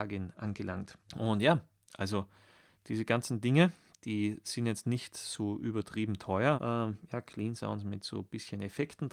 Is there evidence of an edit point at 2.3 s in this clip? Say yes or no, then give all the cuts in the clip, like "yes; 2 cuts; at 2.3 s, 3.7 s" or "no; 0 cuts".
no; 2 cuts; at 1.0 s, 6.6 s